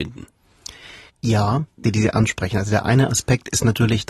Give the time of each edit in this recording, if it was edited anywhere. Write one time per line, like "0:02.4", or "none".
0:01.8